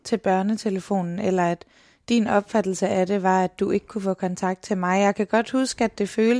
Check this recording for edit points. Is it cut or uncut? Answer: uncut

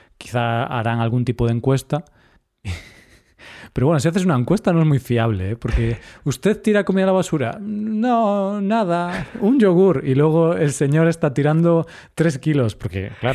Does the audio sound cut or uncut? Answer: uncut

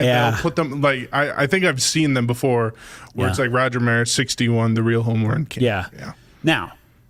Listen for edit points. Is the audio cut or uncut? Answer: uncut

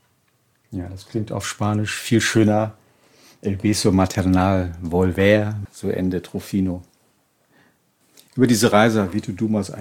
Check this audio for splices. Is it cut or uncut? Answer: cut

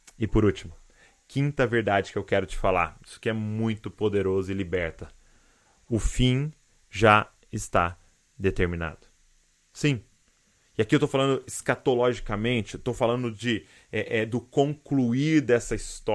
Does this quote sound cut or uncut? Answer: uncut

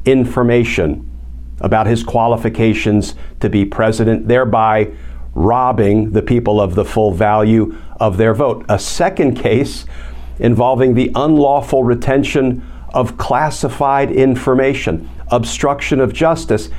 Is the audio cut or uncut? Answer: uncut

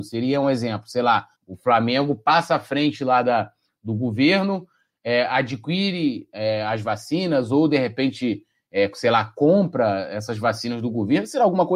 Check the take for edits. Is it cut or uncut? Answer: cut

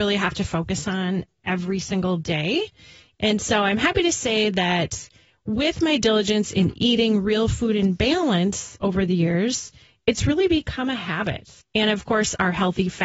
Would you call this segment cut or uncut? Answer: cut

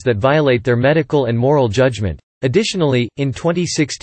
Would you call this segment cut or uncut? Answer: cut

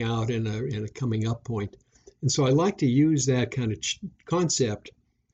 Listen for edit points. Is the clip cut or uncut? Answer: uncut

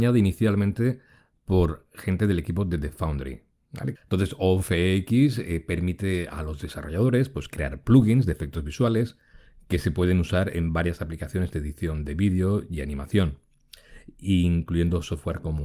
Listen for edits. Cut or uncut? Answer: cut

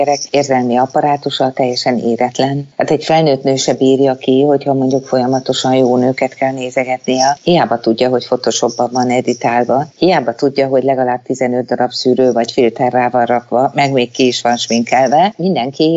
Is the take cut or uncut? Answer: uncut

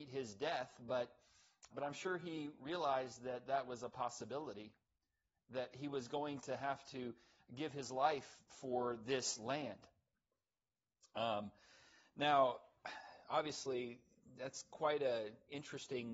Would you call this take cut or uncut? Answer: cut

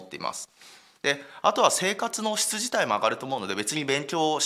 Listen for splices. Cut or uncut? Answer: uncut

